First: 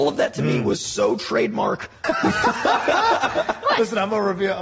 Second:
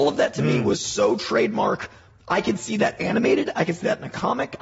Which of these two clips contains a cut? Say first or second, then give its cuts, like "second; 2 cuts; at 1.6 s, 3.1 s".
first; 1 cut; at 2.0 s